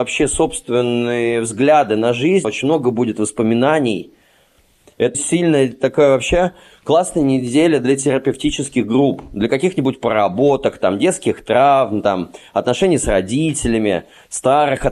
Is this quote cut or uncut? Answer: cut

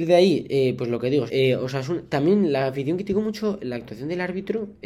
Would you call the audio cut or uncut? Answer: cut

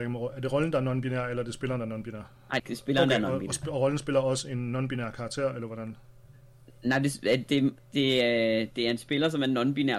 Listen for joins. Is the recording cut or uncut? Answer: cut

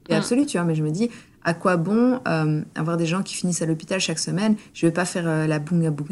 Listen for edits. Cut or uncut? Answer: uncut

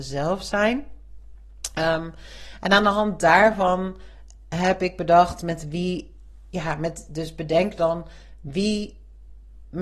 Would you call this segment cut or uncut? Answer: uncut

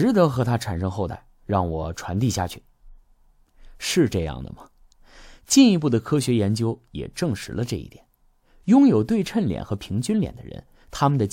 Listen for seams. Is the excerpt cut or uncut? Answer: uncut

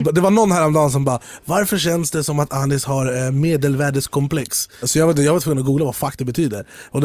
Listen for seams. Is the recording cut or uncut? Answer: cut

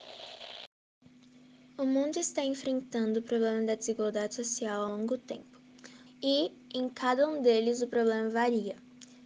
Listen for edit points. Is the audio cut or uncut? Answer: cut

